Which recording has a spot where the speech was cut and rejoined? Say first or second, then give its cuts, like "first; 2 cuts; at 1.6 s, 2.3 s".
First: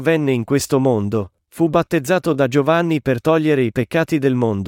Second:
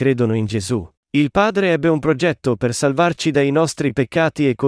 second; 1 cut; at 1.0 s